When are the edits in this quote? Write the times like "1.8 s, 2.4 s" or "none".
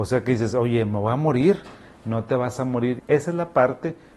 3.0 s

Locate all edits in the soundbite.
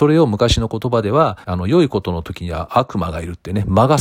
1.4 s

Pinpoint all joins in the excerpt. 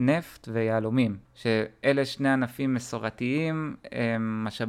1.2 s

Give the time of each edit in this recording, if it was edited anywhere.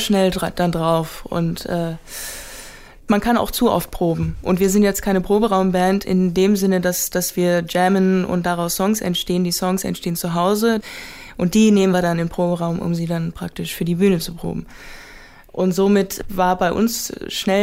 6.0 s

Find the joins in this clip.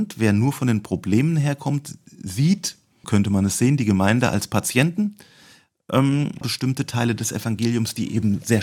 3.0 s, 6.4 s

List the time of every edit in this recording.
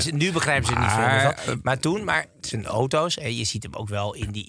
none

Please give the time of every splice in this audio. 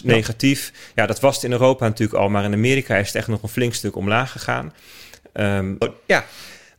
5.8 s

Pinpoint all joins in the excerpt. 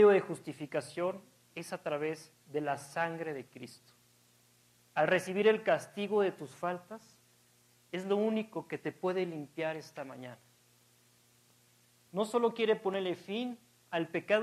4.8 s, 12.1 s

